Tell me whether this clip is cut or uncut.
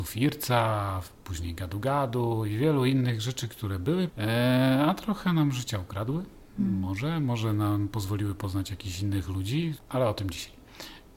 cut